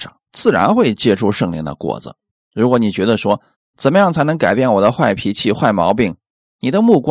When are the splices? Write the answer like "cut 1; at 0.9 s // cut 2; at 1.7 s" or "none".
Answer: none